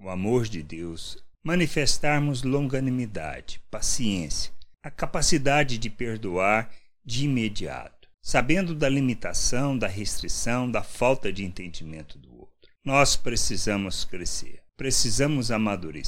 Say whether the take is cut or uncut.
cut